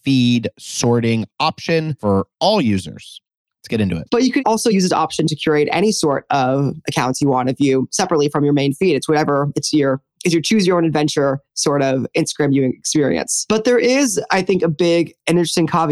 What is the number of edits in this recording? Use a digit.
1